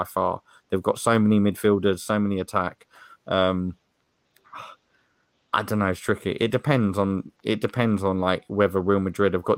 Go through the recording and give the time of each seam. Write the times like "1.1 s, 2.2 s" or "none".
none

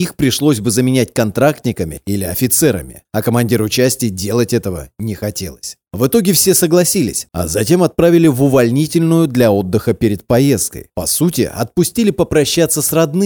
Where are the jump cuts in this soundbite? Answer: 7.3 s

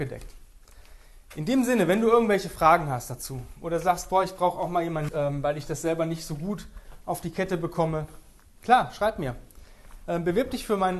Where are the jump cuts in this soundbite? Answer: 5.1 s

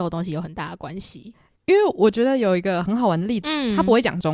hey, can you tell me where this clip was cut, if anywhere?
3.4 s

